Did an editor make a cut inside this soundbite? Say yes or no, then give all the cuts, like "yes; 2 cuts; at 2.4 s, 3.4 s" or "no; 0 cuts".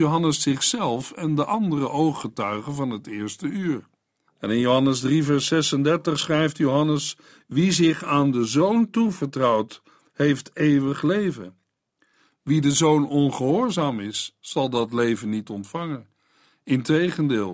yes; 1 cut; at 4.3 s